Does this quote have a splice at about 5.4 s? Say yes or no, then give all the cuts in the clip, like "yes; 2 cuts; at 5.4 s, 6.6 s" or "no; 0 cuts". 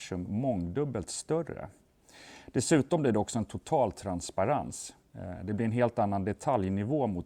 no; 0 cuts